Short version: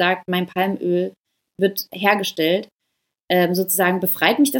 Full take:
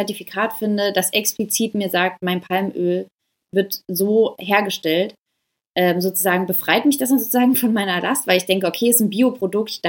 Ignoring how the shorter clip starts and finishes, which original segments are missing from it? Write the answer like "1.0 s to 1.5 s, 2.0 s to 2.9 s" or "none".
3.8 s to 4.4 s

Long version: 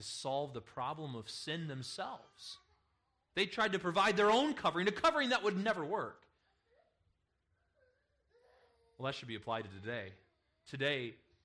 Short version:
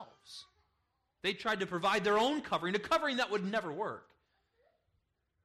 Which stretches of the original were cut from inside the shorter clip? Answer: none

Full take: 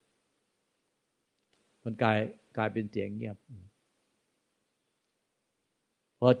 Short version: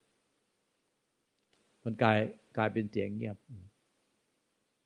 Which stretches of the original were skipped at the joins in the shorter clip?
none

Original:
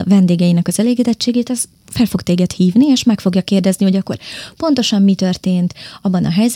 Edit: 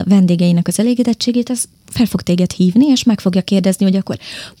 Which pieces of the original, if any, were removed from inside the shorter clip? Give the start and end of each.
none

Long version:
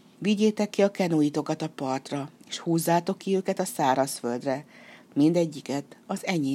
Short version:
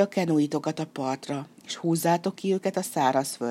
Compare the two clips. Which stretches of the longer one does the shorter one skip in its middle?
none

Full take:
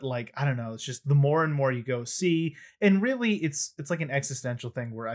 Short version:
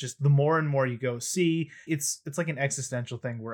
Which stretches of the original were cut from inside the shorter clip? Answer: 2.7 s to 3.4 s

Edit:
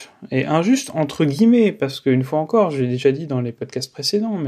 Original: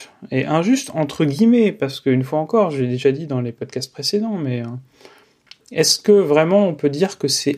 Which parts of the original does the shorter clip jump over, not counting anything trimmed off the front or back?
none

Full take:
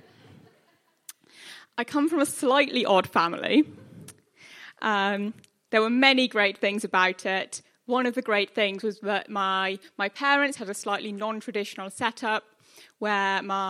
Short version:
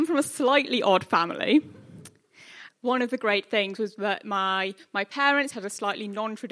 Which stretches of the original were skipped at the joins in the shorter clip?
4.7 s to 7.7 s

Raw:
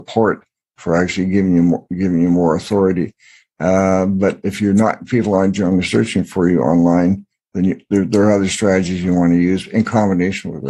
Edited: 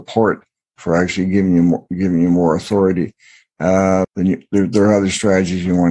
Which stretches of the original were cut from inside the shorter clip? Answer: 4.0 s to 7.4 s

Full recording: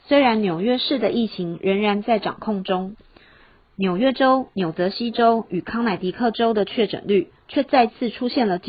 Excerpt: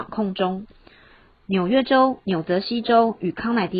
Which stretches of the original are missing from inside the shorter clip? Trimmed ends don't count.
none

